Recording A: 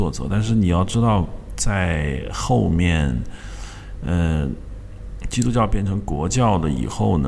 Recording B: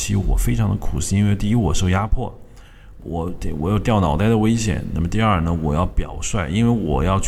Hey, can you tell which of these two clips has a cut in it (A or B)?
B